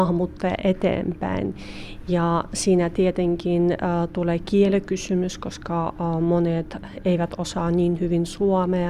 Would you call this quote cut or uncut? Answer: uncut